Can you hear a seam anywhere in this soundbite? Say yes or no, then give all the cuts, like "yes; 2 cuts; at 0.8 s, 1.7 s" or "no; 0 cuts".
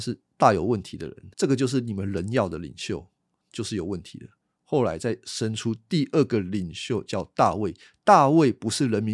yes; 1 cut; at 1.3 s